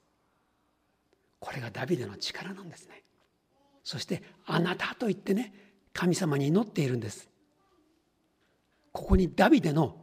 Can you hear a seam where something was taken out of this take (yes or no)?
yes